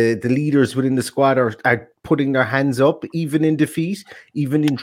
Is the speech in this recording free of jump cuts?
yes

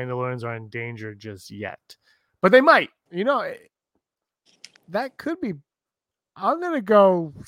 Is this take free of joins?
no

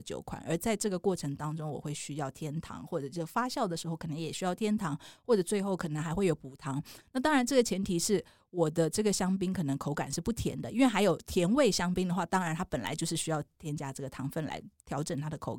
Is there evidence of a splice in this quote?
no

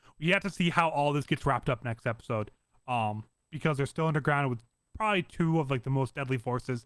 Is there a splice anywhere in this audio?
no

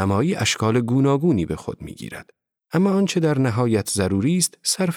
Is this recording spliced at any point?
yes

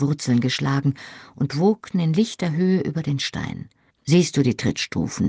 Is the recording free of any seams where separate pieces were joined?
no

